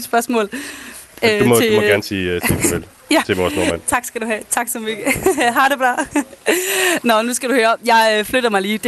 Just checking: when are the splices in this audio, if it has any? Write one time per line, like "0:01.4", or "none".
none